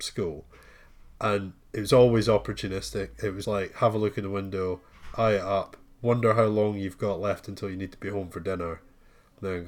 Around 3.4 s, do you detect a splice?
yes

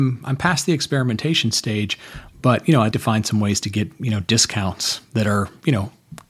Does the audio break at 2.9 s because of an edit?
yes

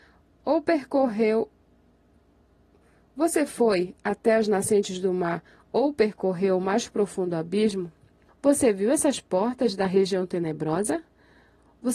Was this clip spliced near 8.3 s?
yes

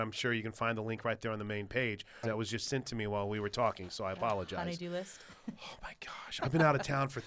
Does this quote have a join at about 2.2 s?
yes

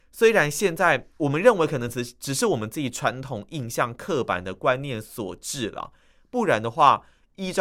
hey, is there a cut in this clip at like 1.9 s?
no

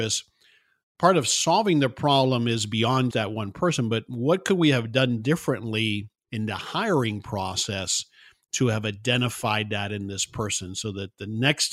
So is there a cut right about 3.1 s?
yes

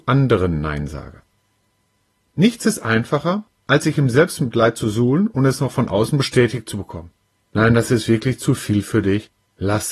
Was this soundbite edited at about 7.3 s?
yes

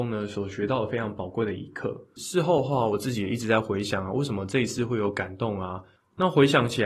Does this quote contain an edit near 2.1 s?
no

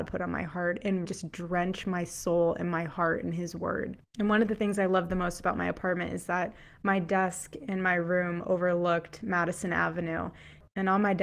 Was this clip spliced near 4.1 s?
no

